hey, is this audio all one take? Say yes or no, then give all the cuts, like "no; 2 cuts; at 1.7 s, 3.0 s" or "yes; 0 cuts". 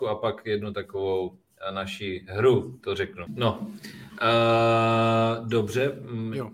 no; 1 cut; at 3.3 s